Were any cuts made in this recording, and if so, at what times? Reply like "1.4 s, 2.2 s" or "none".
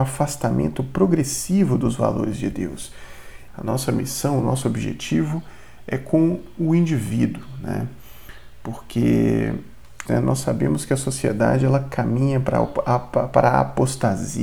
3.5 s, 10.1 s